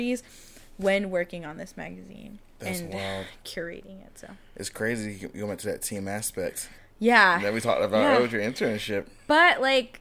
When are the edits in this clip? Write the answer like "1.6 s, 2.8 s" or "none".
none